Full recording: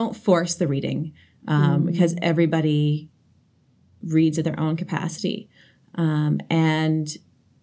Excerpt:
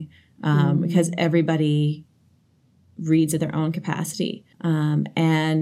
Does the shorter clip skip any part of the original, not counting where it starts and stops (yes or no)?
yes